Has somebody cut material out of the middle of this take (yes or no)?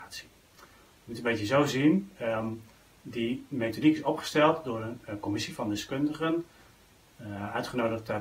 no